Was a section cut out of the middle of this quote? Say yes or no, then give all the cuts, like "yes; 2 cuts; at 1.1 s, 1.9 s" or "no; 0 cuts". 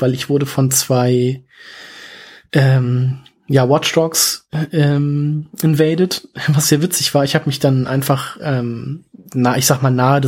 no; 0 cuts